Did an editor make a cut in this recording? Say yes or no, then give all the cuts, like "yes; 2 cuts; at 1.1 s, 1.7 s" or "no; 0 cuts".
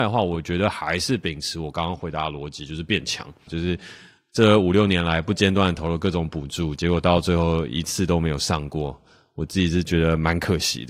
yes; 1 cut; at 3.5 s